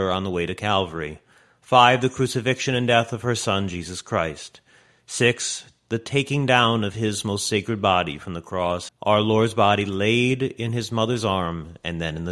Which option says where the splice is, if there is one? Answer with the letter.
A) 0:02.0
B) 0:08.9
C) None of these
B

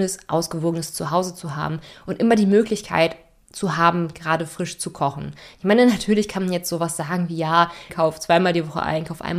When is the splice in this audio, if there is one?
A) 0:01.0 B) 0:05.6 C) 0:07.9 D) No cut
C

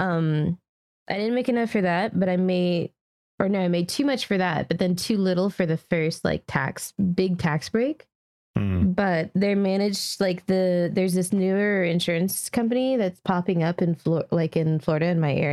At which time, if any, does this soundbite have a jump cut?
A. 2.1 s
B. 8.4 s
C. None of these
C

